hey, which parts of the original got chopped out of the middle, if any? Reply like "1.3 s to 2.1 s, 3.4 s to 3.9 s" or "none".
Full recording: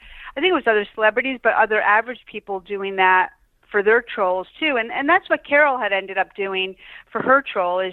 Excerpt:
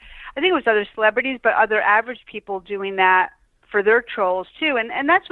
none